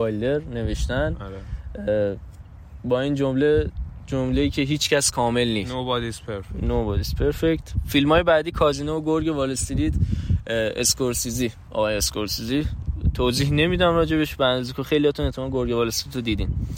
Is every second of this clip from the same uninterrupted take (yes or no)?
yes